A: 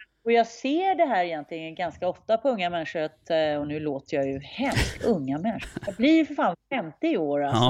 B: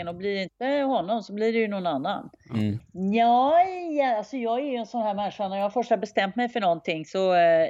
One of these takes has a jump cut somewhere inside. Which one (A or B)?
B